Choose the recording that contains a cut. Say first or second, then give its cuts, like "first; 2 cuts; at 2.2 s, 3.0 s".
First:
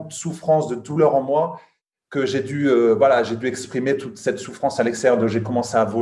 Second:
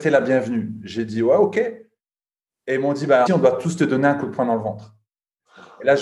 second; 1 cut; at 3.3 s